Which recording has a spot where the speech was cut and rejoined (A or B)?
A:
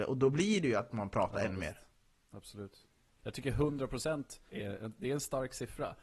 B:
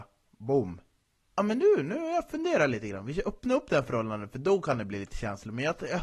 A